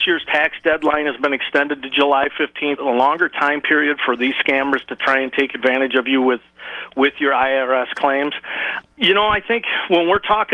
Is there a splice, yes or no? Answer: yes